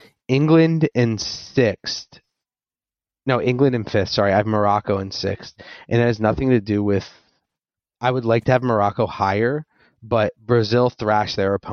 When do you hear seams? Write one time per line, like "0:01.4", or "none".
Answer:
none